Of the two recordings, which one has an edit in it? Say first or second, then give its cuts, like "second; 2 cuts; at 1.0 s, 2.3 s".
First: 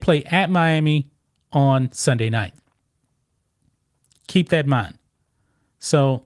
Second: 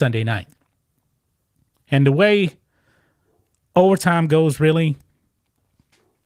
second; 1 cut; at 1.7 s